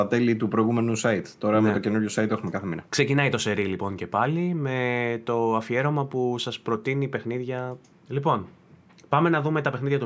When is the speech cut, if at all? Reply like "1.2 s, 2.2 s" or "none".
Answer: 2.9 s, 7.9 s